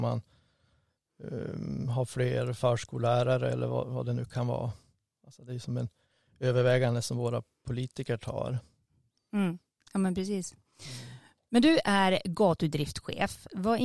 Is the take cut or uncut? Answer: uncut